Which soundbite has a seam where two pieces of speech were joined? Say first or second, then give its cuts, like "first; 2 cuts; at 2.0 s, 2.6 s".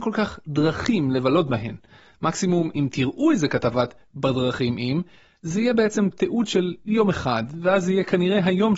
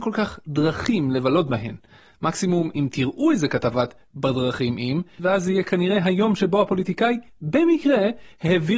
second; 1 cut; at 5.2 s